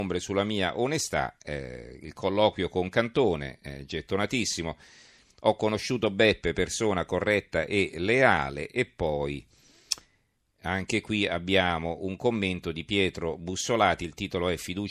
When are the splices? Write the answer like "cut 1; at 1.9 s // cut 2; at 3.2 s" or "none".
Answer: none